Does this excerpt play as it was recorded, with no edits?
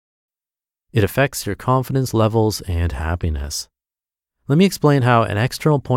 yes; 0 cuts

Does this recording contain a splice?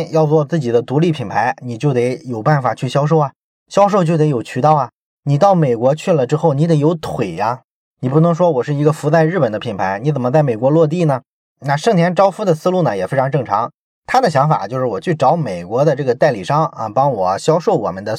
no; 0 cuts

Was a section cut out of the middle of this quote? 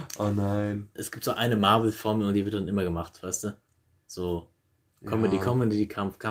yes; 2 cuts; at 0.9 s, 4.9 s

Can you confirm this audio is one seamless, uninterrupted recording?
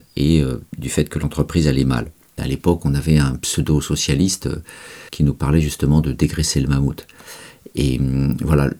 no; 2 cuts; at 2.4 s, 5.1 s

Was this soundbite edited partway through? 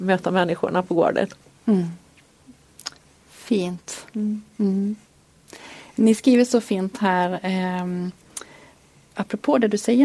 no; 0 cuts

